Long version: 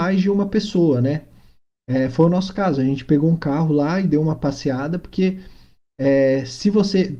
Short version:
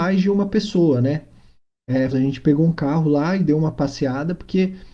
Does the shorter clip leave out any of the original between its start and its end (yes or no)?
yes